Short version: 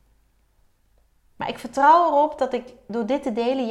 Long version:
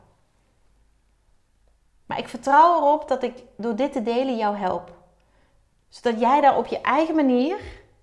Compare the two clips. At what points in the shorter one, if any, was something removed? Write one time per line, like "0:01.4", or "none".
none